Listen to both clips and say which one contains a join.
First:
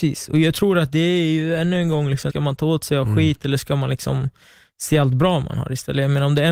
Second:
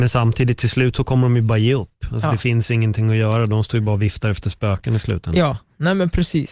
first; 1 cut; at 2.3 s

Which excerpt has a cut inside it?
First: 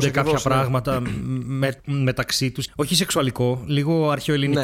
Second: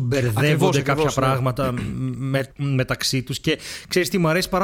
first; 1 cut; at 2.7 s

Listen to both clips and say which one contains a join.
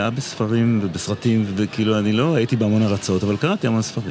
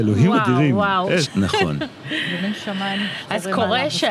second; 1 cut; at 1.2 s

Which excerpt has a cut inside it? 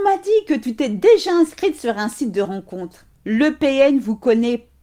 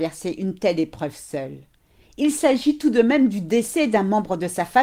first; 1 cut; at 3.1 s

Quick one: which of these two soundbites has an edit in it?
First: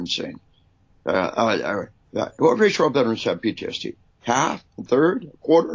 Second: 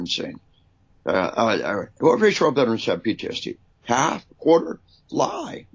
second; 2 cuts; at 2.0 s, 4.3 s

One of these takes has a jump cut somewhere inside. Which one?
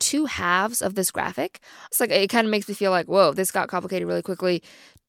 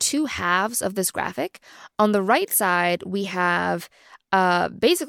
first; 1 cut; at 1.9 s

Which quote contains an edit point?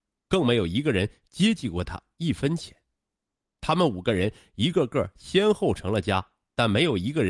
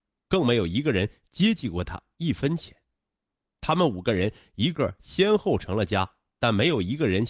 second; 1 cut; at 4.7 s

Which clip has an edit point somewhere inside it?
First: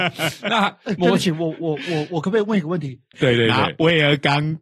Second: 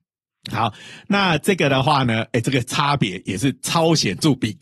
first; 1 cut; at 3.1 s

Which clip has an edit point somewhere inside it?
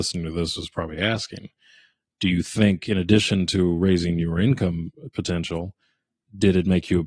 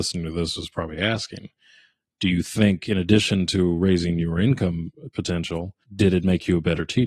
second; 1 cut; at 5.8 s

